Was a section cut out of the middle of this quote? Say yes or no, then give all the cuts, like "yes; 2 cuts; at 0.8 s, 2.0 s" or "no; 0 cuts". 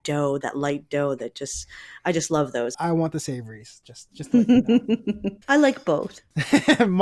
yes; 2 cuts; at 2.7 s, 5.4 s